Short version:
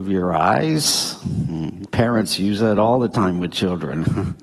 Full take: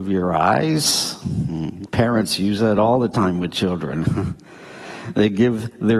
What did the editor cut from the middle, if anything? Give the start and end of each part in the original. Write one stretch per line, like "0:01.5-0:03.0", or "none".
none